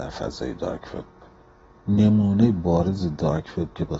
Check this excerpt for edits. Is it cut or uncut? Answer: uncut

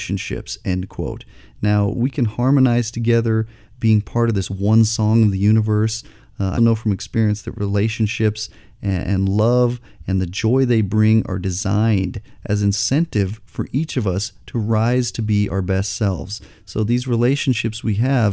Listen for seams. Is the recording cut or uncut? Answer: cut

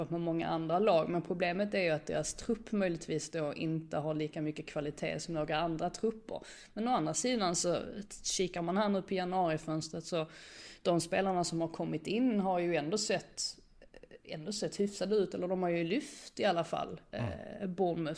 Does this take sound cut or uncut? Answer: uncut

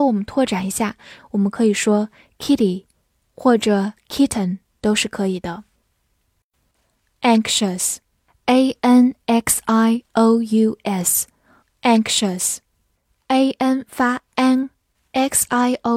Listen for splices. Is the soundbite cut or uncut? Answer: cut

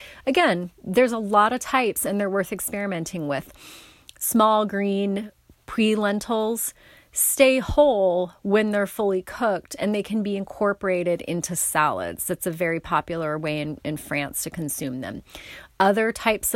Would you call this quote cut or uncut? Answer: uncut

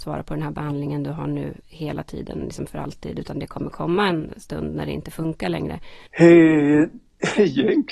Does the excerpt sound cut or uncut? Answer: cut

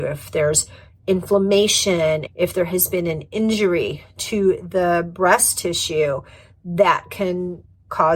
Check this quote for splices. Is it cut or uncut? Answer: cut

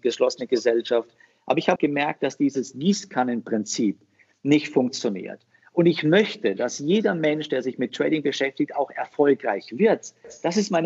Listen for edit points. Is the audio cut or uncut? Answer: cut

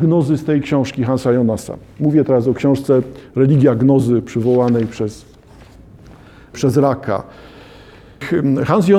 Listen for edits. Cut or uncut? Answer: uncut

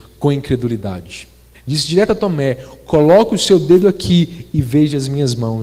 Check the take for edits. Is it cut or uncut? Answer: cut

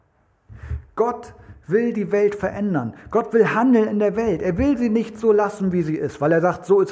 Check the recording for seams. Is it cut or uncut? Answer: uncut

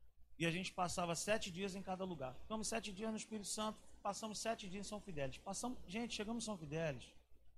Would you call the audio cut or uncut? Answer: uncut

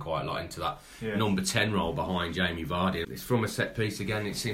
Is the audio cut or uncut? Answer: cut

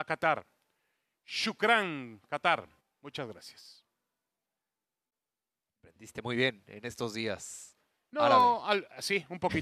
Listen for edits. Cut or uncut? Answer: cut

